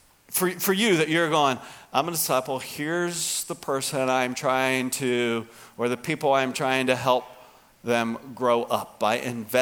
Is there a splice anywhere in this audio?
no; 0 cuts

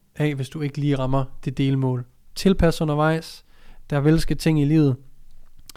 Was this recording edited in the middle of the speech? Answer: no; 0 cuts

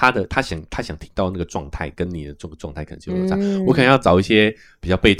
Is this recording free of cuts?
yes; 0 cuts

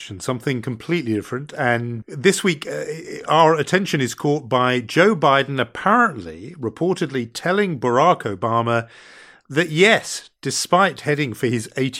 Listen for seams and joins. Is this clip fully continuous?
no; 1 cut; at 2.0 s

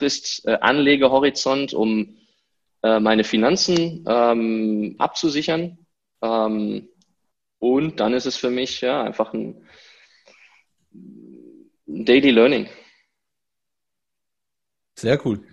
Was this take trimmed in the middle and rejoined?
no; 0 cuts

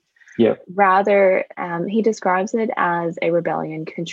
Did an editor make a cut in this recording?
no; 0 cuts

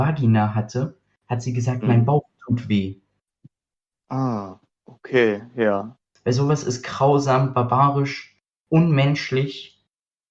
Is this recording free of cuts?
no; 1 cut; at 6.2 s

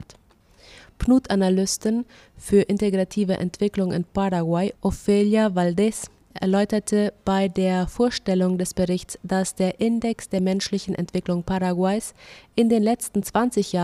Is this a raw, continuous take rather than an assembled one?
yes; 0 cuts

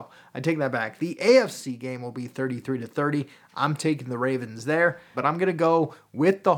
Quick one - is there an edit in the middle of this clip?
yes; 1 cut; at 5.1 s

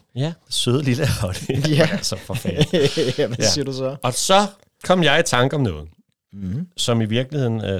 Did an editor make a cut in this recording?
no; 0 cuts

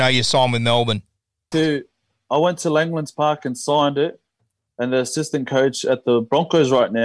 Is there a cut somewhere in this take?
yes; 1 cut; at 1.5 s

